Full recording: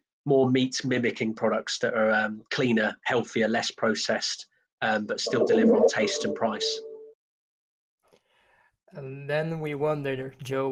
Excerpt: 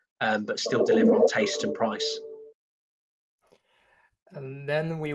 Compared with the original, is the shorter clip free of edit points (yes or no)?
yes